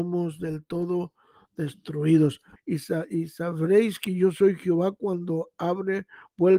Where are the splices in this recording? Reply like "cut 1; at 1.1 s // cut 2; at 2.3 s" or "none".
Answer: cut 1; at 2.6 s